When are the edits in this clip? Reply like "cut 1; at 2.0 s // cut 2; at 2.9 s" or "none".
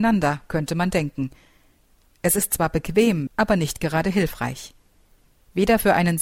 cut 1; at 3.3 s